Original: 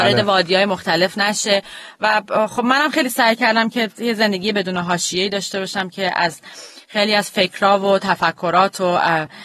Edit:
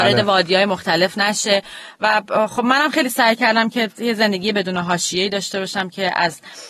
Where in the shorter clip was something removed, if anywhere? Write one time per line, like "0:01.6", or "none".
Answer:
none